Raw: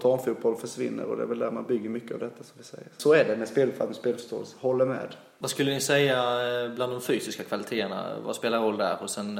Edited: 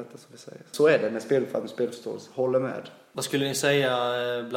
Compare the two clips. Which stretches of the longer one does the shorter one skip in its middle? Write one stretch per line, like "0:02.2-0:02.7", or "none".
none